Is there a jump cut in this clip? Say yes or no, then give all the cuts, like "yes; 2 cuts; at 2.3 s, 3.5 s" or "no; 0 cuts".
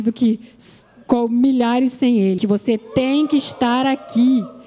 yes; 1 cut; at 2.4 s